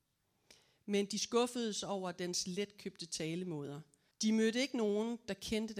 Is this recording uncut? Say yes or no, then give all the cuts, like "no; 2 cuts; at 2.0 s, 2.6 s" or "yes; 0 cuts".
no; 1 cut; at 4.1 s